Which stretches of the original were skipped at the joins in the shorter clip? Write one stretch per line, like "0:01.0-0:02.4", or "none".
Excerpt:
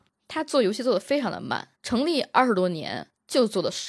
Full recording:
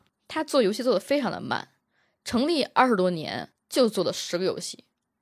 0:01.7-0:02.2